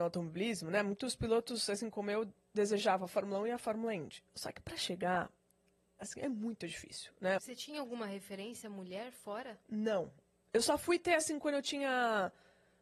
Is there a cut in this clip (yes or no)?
yes